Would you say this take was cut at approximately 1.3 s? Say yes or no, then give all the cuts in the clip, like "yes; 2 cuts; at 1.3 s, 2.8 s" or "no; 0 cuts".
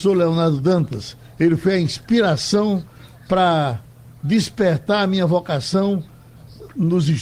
no; 0 cuts